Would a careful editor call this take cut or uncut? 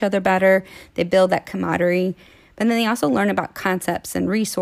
uncut